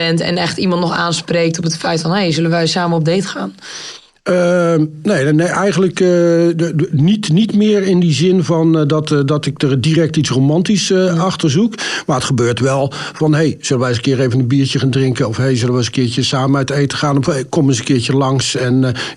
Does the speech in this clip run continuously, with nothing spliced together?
yes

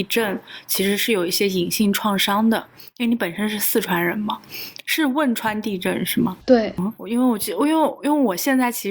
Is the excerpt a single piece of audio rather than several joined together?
yes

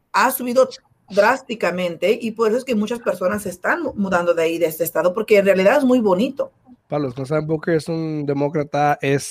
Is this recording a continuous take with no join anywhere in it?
no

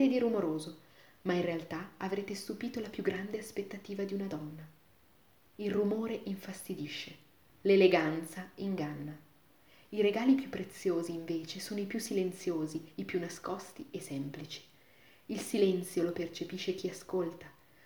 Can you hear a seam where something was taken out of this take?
yes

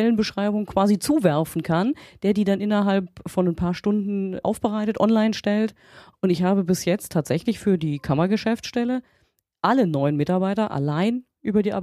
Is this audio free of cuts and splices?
no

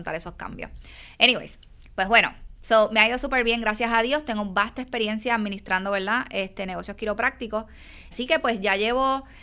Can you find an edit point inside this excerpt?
yes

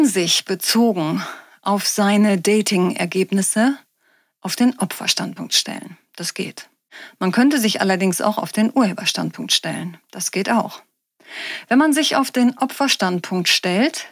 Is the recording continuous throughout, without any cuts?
yes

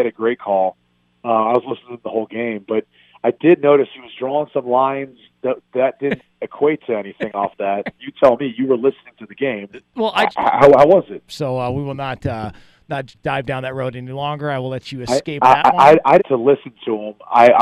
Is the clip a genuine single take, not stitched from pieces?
no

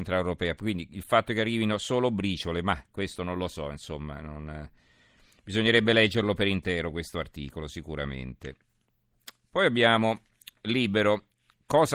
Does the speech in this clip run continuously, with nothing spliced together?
yes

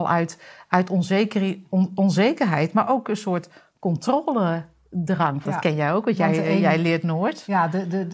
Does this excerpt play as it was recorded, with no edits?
no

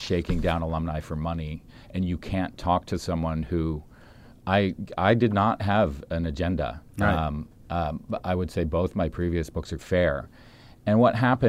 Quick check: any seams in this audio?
yes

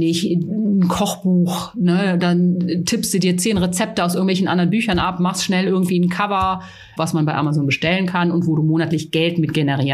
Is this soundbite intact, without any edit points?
no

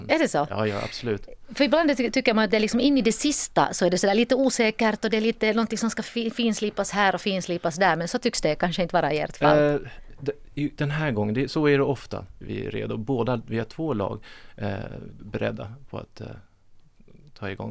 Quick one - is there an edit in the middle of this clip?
yes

